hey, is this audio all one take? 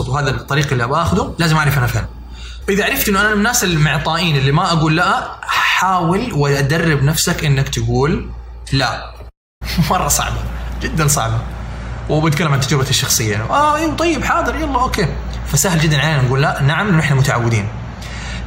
no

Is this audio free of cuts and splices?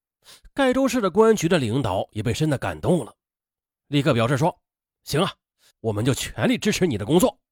no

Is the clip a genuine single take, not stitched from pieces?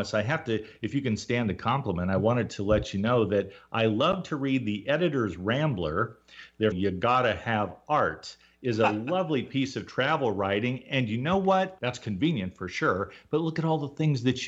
no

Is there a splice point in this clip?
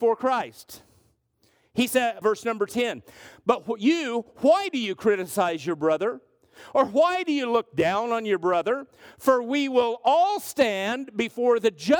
yes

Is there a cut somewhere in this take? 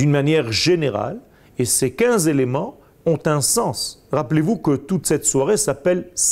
yes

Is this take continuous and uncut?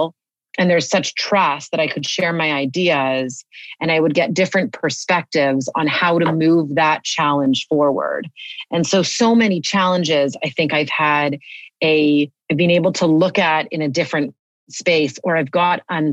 no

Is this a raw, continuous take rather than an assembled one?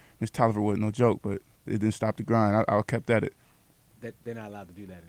yes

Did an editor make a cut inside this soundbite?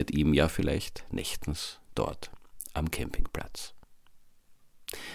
no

